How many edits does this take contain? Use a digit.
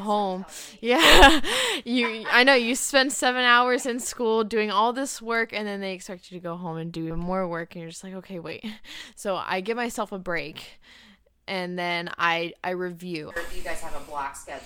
2